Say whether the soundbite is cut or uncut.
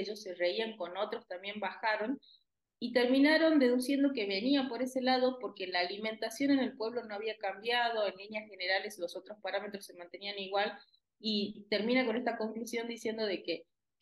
cut